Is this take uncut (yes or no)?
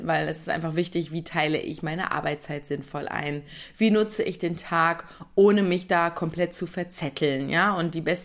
yes